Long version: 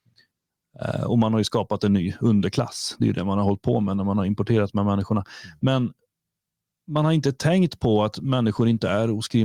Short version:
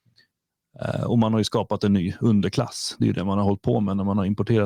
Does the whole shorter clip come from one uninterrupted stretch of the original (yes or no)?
yes